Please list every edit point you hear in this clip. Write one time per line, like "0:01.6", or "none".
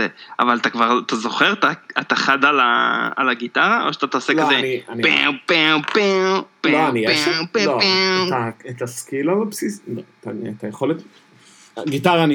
none